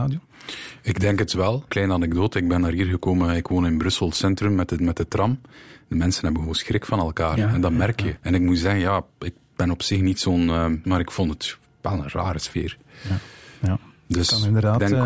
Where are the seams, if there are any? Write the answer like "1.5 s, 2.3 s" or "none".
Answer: 1.7 s, 8.2 s, 10.8 s